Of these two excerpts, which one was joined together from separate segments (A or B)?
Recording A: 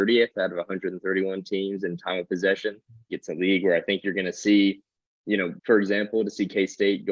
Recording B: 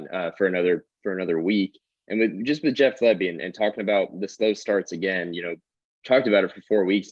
A